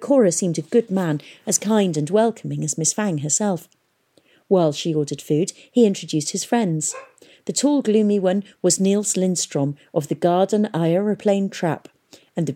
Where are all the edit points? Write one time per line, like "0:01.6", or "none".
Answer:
none